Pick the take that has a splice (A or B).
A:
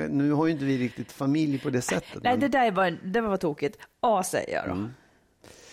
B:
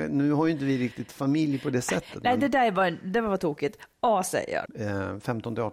B